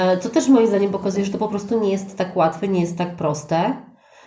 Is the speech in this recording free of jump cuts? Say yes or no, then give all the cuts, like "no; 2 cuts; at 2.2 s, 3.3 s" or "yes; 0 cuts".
yes; 0 cuts